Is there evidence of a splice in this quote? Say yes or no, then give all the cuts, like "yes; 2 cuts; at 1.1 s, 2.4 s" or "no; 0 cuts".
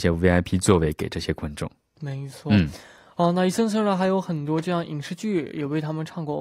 no; 0 cuts